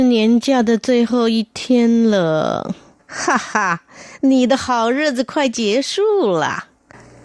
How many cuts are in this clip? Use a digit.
1